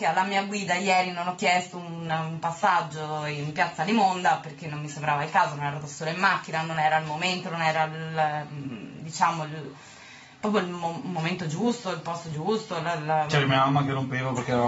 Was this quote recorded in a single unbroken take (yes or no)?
yes